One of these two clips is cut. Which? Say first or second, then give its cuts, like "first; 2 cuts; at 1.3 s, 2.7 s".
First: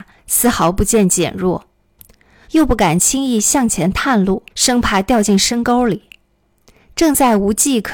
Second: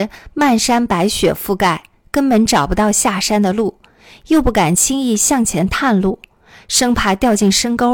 first; 2 cuts; at 2.4 s, 4.5 s